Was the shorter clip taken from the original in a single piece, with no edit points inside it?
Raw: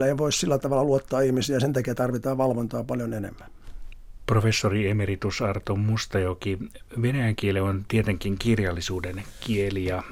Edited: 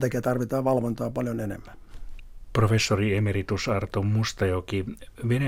yes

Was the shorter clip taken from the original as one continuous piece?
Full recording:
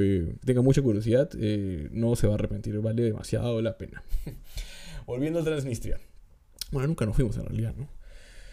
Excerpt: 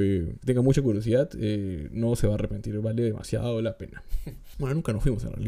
no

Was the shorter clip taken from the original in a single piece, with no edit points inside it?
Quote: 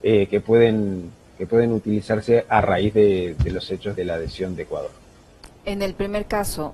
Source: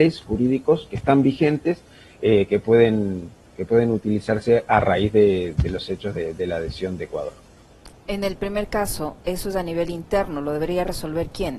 no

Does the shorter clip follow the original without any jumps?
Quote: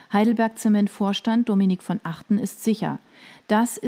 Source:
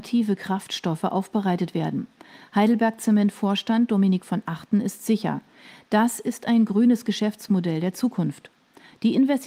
yes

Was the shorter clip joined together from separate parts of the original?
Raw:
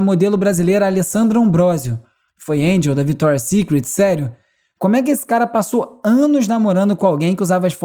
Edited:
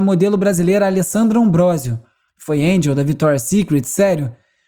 no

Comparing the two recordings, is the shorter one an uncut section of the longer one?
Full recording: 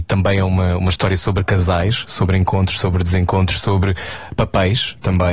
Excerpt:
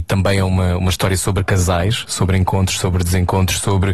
yes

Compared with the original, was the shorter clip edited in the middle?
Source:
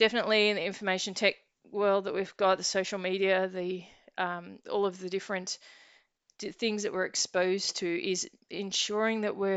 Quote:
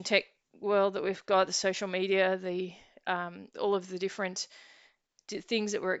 no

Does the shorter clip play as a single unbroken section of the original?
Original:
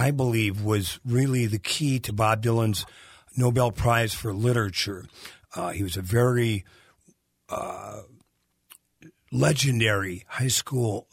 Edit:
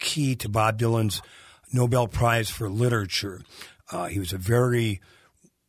yes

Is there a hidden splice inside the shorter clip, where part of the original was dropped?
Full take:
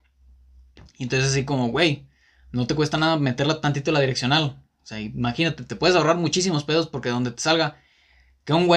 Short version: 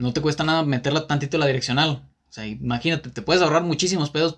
no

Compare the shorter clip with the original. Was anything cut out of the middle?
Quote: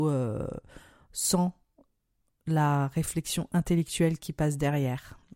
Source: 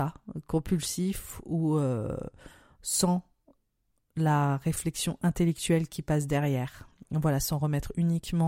no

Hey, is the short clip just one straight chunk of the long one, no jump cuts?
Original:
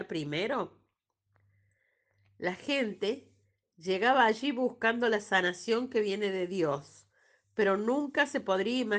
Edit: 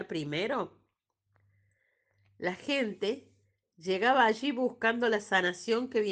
yes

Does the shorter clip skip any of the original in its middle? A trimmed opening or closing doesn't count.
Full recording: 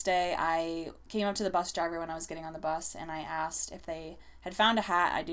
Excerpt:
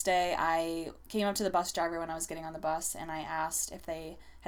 no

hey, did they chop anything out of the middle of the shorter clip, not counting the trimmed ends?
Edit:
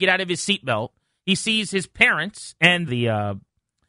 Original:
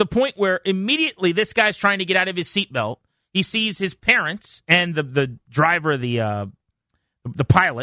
yes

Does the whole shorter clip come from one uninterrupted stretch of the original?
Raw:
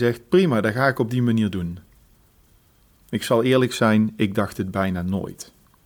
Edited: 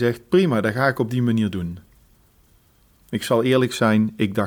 yes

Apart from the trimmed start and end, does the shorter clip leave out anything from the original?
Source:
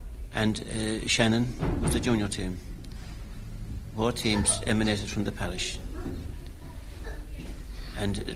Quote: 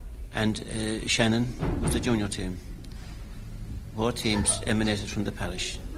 no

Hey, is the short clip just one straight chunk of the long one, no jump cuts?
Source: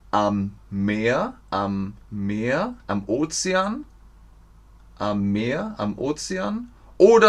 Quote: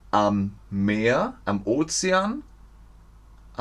no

